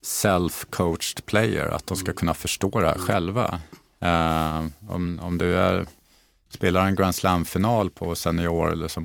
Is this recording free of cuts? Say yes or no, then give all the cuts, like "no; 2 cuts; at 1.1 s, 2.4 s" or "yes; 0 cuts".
yes; 0 cuts